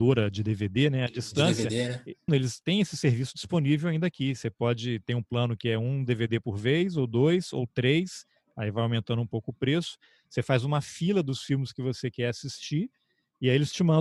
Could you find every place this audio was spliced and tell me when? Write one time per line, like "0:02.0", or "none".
0:02.3

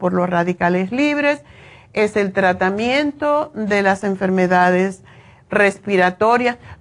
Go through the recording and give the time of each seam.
none

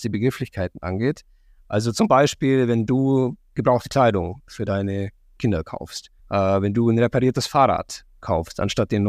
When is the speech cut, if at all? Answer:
0:06.2

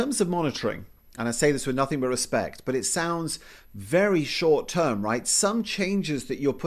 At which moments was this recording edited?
none

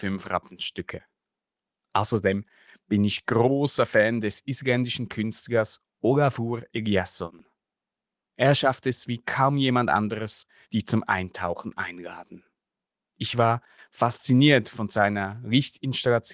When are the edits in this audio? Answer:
0:10.6

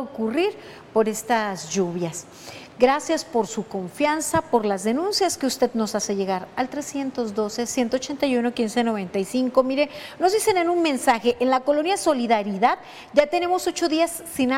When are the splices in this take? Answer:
none

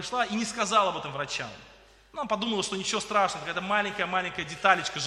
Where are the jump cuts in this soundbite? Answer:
none

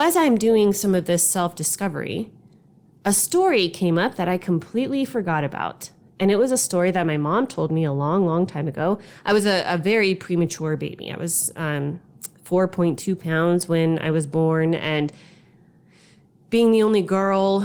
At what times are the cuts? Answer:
none

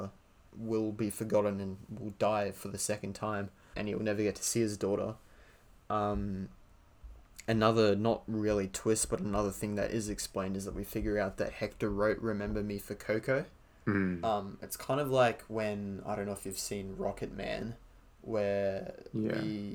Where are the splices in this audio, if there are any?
0:03.7

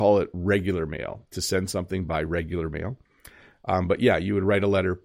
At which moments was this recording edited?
none

